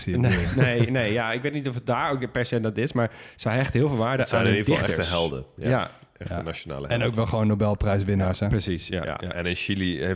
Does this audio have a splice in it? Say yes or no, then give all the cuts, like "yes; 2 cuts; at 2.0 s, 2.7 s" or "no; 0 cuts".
no; 0 cuts